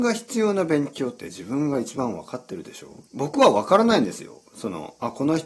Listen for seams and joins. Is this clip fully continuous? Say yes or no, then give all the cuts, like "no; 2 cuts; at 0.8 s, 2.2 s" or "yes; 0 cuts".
no; 1 cut; at 3.1 s